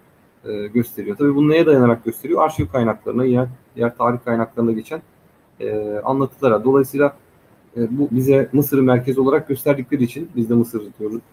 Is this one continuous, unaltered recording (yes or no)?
no